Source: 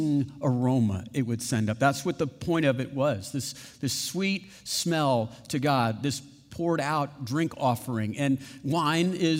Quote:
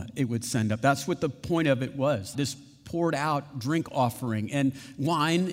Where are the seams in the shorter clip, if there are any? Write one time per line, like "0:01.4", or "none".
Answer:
0:02.3